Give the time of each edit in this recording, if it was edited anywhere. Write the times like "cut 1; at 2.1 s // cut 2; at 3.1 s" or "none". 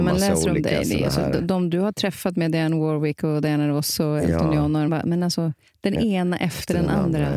cut 1; at 4.9 s